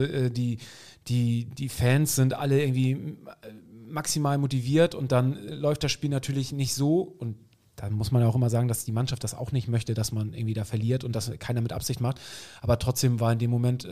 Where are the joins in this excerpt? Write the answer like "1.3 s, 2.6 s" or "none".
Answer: none